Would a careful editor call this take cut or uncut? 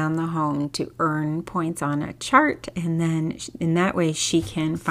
uncut